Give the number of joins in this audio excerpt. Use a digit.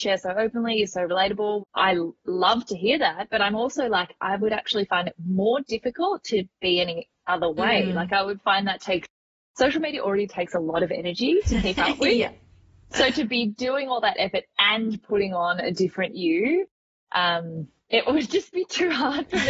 1